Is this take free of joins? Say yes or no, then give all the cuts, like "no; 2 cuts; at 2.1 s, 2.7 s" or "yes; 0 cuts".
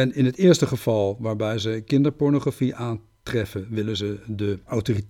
yes; 0 cuts